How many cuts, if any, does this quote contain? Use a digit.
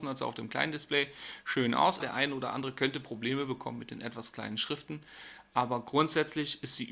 1